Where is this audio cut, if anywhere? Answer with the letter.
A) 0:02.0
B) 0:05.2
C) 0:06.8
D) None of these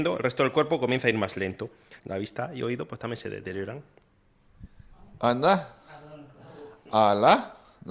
A